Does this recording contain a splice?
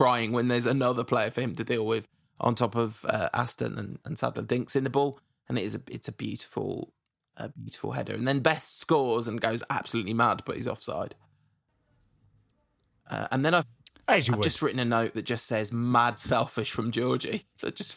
no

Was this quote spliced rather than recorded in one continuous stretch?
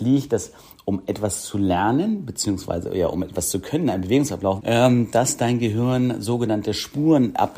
yes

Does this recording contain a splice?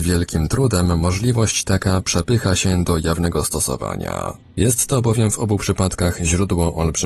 no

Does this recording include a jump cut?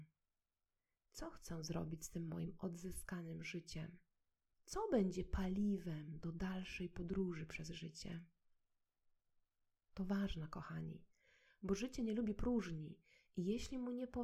yes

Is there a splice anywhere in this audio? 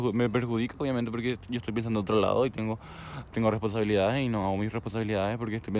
no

